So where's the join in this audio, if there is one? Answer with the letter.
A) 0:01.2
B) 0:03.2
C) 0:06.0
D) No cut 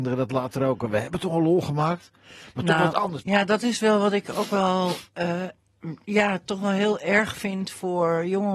B